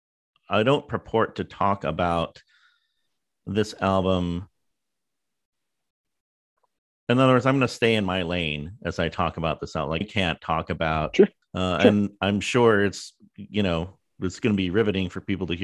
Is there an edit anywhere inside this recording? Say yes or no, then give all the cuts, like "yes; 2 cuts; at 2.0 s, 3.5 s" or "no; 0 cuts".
yes; 2 cuts; at 10.0 s, 11.4 s